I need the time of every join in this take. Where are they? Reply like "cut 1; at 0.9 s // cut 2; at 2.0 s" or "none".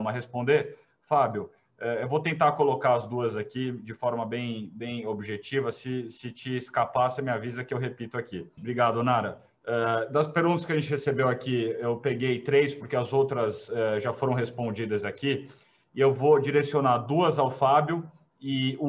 cut 1; at 8.6 s